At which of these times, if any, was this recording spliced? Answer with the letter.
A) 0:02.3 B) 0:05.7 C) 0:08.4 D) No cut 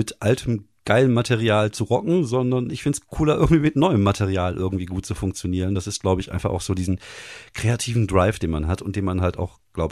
D